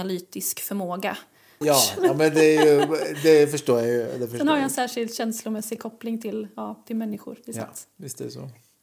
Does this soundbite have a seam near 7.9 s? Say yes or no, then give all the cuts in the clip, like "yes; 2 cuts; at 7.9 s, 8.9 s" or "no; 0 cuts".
no; 1 cut; at 1.6 s